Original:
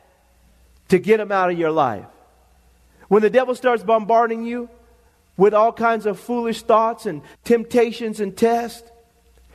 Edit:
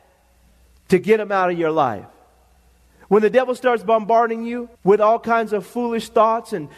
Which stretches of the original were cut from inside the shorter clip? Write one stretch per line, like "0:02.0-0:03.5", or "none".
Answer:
0:04.7-0:05.3